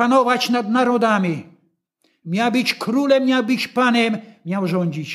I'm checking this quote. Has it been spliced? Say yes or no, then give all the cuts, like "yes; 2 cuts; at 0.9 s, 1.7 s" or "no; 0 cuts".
no; 0 cuts